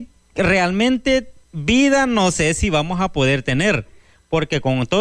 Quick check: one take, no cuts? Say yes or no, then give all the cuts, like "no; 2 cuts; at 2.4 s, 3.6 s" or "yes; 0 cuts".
yes; 0 cuts